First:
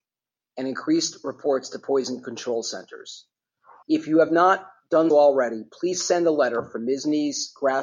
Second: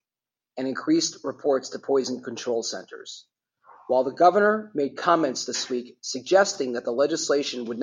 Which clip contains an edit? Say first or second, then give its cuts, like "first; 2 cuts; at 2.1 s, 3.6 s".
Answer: first; 2 cuts; at 3.8 s, 5.1 s